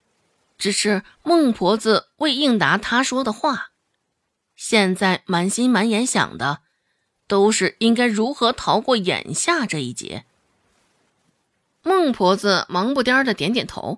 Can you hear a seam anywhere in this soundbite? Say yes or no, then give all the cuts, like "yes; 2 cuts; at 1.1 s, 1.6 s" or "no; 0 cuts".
yes; 1 cut; at 11.1 s